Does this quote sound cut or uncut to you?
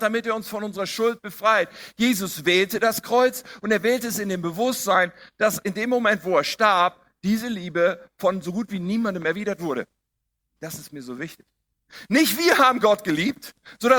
cut